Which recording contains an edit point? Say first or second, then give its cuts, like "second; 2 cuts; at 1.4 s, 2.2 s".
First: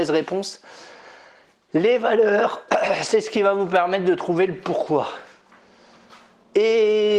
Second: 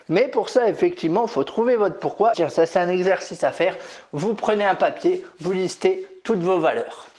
second; 1 cut; at 2.3 s